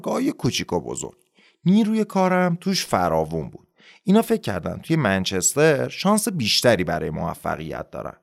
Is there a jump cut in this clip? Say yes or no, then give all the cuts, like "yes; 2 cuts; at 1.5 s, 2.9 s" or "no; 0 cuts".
no; 0 cuts